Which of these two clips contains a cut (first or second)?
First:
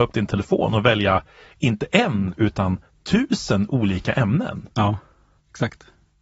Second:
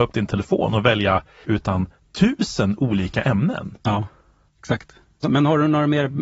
second